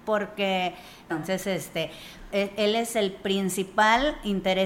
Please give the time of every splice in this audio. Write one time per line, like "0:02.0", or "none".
0:01.1
0:02.3